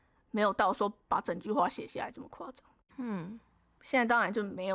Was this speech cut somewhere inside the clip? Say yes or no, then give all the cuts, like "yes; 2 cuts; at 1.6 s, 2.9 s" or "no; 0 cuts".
yes; 1 cut; at 2.9 s